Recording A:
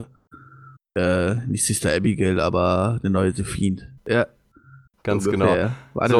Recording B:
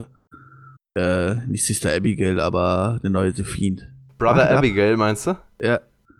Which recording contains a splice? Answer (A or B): A